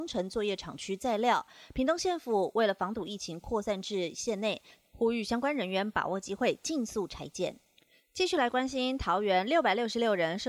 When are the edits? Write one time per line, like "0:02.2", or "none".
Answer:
none